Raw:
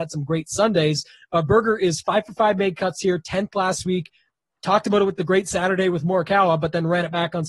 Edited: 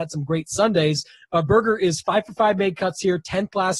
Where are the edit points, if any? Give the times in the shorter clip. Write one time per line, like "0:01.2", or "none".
none